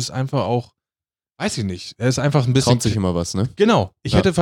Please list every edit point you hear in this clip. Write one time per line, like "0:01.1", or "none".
none